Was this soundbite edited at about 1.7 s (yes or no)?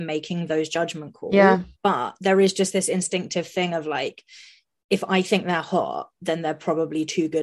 yes